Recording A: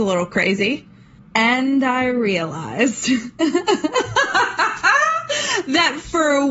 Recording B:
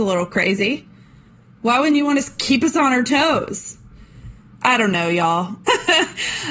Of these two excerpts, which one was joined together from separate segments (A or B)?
A